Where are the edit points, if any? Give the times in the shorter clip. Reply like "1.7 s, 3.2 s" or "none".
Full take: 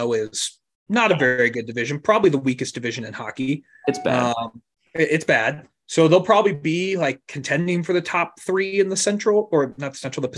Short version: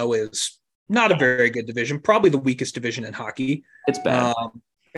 none